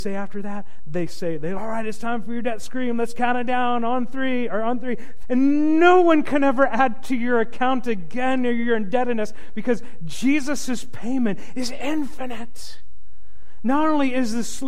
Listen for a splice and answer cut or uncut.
cut